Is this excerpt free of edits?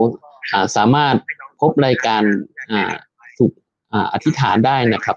yes; 0 cuts

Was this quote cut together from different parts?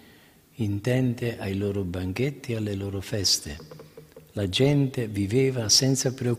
no; 0 cuts

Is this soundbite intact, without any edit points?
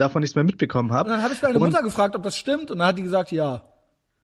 yes; 0 cuts

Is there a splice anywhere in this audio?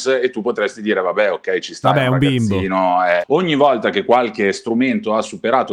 yes; 1 cut; at 3.2 s

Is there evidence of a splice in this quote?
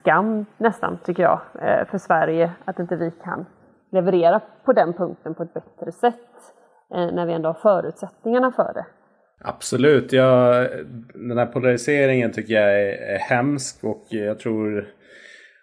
no; 0 cuts

